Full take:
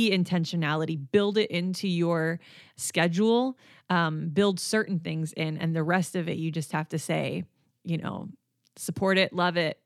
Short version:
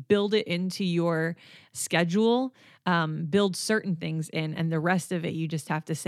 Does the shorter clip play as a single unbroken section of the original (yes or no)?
yes